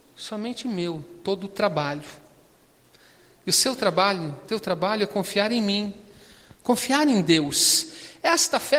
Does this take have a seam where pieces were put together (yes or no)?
no